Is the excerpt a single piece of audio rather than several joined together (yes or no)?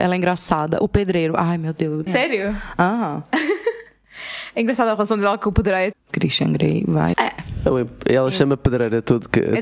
no